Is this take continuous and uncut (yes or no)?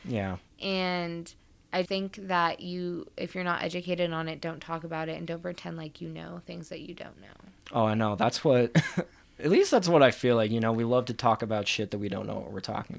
no